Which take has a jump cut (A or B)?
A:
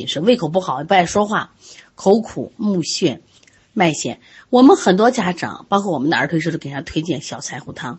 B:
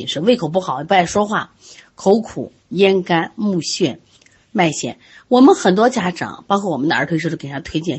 A